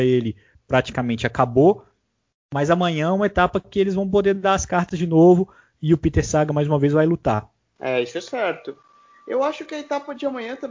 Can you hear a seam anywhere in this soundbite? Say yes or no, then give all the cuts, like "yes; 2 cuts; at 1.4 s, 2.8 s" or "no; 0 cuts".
no; 0 cuts